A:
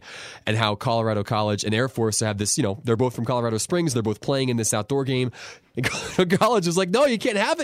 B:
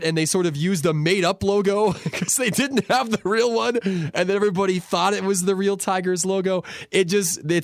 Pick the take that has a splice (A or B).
A